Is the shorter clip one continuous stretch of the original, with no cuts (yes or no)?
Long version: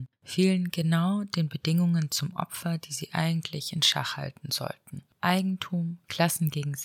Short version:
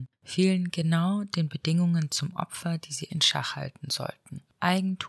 no